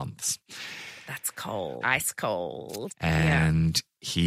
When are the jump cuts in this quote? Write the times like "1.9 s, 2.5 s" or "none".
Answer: 1.8 s, 2.9 s